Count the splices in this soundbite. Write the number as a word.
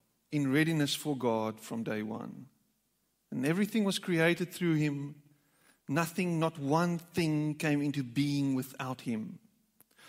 zero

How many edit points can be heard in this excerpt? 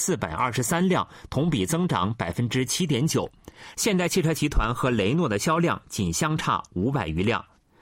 one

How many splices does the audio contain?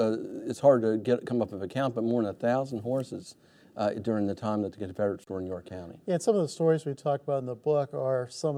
zero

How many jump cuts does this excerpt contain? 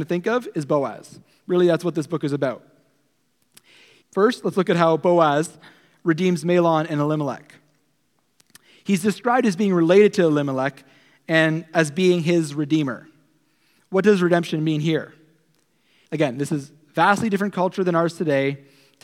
two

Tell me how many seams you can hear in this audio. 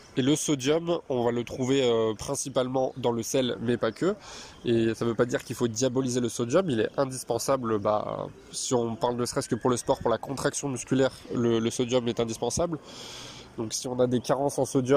zero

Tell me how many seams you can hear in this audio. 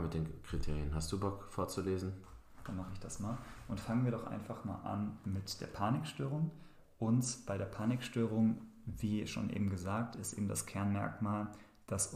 one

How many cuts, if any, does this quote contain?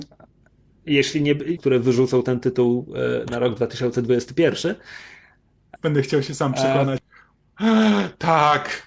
three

